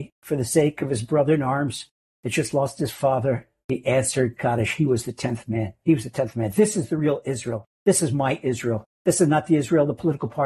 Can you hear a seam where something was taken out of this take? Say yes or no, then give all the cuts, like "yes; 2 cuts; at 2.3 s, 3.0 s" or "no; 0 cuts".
no; 0 cuts